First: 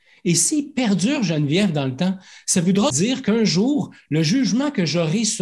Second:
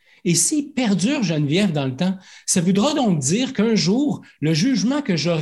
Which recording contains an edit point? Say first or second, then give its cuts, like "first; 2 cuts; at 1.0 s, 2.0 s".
first; 1 cut; at 2.9 s